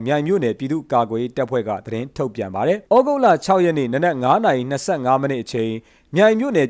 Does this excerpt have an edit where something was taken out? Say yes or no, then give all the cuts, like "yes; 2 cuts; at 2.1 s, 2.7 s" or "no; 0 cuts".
yes; 1 cut; at 2.9 s